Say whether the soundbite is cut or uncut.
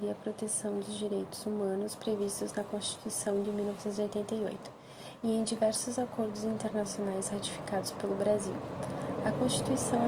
uncut